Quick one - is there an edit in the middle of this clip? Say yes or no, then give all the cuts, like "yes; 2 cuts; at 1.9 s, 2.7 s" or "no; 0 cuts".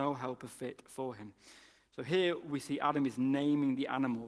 no; 0 cuts